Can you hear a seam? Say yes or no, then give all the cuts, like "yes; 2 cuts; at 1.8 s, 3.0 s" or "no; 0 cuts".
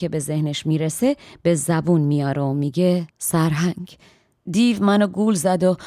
yes; 1 cut; at 3.1 s